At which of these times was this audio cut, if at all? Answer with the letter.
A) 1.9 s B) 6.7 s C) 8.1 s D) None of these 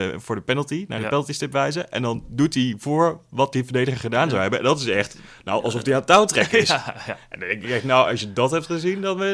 D